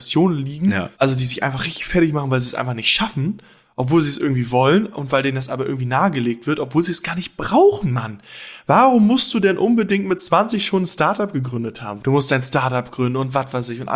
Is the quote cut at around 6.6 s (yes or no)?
no